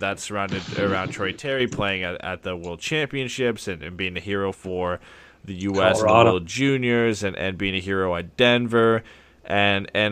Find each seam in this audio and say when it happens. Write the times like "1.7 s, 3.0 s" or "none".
none